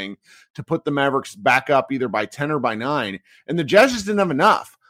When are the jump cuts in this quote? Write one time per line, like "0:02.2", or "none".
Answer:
none